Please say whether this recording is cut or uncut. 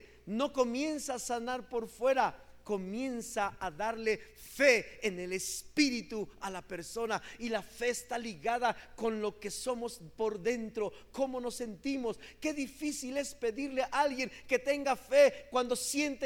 uncut